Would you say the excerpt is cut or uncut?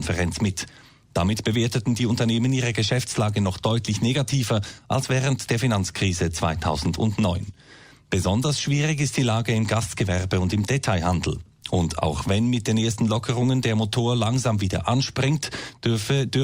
cut